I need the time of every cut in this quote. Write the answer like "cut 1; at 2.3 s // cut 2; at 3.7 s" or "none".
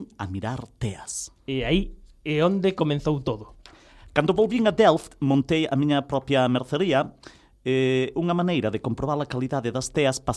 none